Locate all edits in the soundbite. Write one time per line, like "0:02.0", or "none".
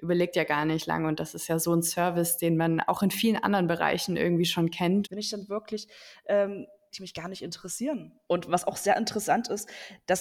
0:05.0
0:06.9
0:08.3